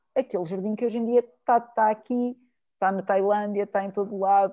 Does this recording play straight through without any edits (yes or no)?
yes